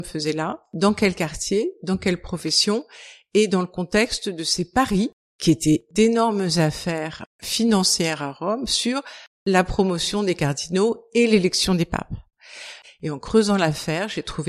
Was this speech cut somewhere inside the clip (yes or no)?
yes